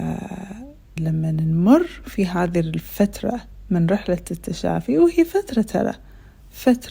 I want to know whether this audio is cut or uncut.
cut